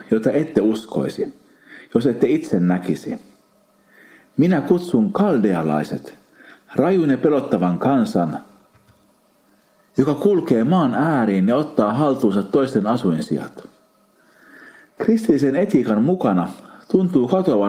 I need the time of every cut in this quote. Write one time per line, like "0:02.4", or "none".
0:14.9